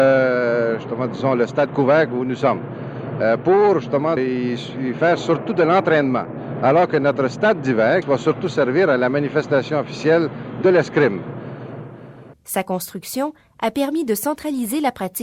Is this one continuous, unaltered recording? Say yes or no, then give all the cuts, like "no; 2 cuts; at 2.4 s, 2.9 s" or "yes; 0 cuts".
no; 3 cuts; at 4.2 s, 8.0 s, 12.3 s